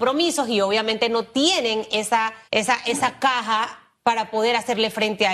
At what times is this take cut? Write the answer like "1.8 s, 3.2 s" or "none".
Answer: 2.5 s